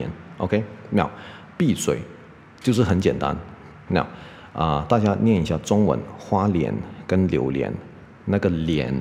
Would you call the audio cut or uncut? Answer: cut